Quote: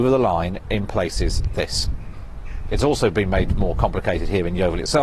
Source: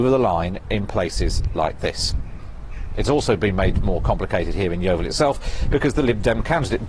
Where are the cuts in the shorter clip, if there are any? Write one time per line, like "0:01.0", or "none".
0:01.5